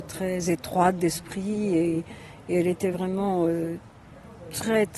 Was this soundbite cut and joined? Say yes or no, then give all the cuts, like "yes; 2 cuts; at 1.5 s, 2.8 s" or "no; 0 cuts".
no; 0 cuts